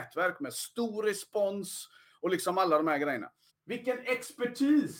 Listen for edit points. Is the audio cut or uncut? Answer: cut